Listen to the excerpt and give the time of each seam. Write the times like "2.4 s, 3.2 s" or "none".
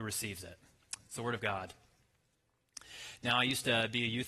none